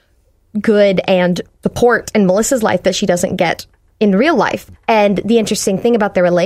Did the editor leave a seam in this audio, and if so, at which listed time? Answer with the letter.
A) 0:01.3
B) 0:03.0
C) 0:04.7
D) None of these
C